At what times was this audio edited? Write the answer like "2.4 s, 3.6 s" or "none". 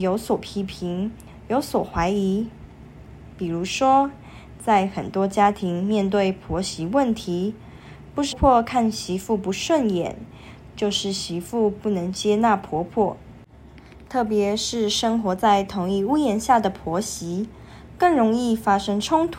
8.3 s

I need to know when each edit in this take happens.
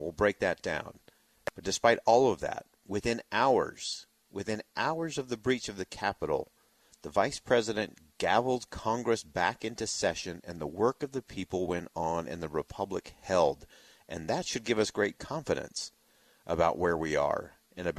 none

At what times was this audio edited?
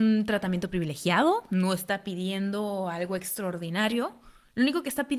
none

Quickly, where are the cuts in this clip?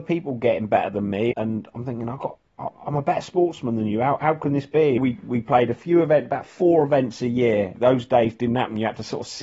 1.3 s, 5.0 s, 7.7 s

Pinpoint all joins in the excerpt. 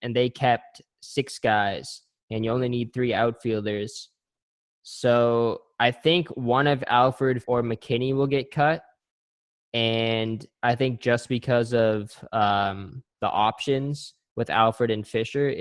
7.4 s

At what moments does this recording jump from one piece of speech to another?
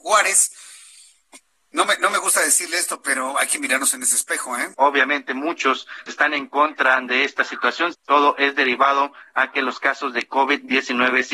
4.7 s, 6.1 s, 7.9 s

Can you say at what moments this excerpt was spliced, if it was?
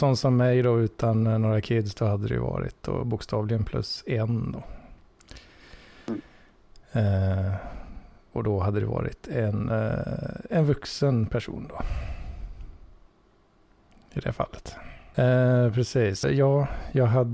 15.1 s, 16.2 s

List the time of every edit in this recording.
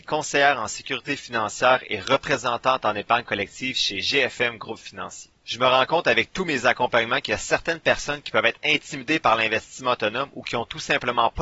5.4 s

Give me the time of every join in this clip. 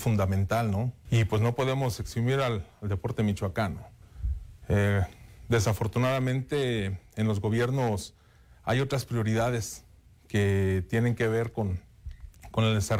1.1 s

